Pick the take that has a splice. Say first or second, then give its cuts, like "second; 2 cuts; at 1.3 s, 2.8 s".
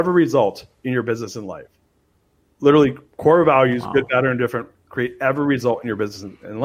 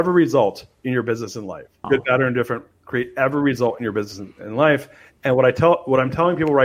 second; 1 cut; at 1.8 s